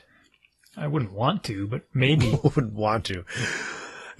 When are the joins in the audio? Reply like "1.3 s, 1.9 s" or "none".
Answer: none